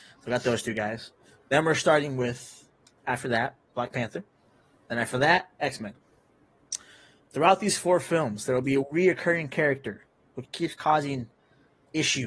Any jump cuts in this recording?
yes; 1 cut; at 10.4 s

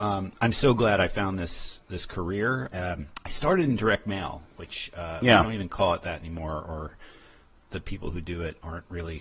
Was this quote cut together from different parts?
yes; 1 cut; at 2.7 s

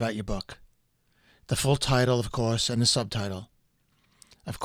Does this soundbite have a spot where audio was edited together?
no; 0 cuts

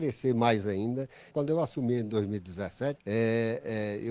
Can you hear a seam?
yes; 2 cuts; at 1.3 s, 3.0 s

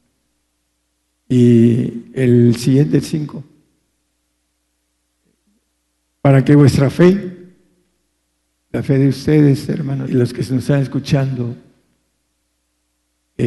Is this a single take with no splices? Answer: no; 1 cut; at 10.1 s

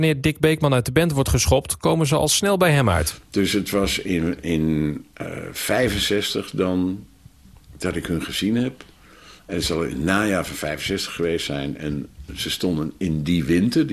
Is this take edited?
no; 0 cuts

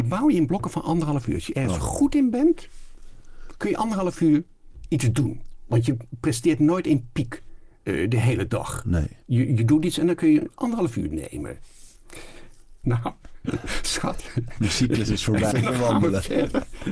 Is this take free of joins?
no; 3 cuts; at 9.2 s, 12.8 s, 15.5 s

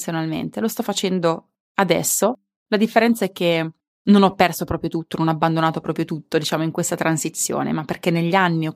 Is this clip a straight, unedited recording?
yes; 0 cuts

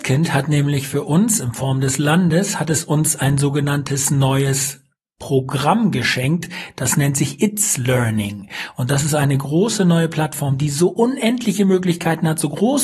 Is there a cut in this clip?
no; 0 cuts

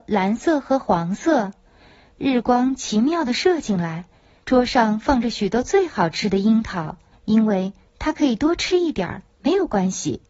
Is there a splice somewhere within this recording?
yes; 2 cuts; at 4.4 s, 7.1 s

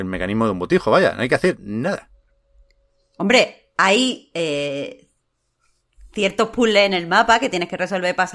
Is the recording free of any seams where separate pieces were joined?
yes; 0 cuts

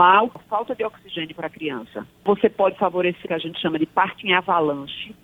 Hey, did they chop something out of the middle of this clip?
yes; 1 cut; at 3.2 s

